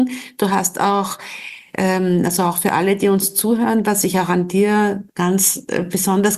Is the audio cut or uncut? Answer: uncut